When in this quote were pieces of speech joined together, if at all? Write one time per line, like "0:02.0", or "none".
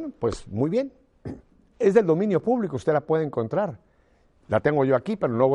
0:01.7